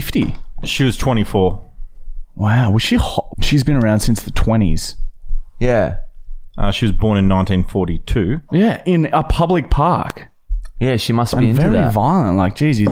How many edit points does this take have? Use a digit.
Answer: 2